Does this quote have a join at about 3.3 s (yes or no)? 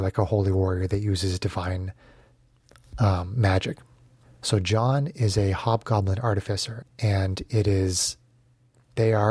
no